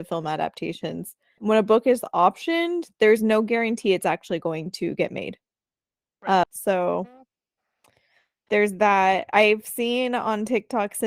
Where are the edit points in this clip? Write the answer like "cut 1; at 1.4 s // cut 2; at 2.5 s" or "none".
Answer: cut 1; at 1.4 s // cut 2; at 6.4 s